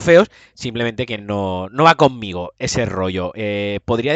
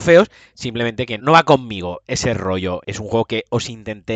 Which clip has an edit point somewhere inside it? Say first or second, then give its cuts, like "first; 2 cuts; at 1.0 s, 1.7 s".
second; 2 cuts; at 1.2 s, 2.8 s